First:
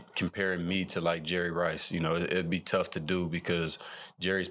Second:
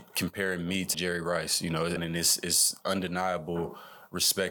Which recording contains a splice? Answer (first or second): second